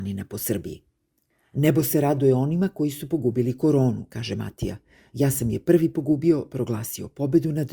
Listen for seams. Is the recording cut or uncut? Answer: uncut